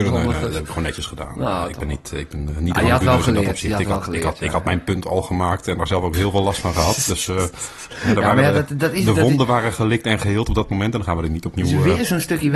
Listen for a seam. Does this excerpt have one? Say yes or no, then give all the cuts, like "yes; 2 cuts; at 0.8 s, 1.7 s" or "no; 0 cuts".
no; 0 cuts